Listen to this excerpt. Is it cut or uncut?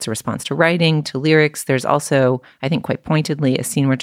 uncut